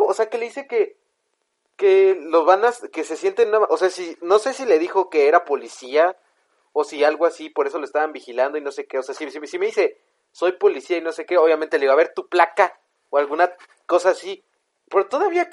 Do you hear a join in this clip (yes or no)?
no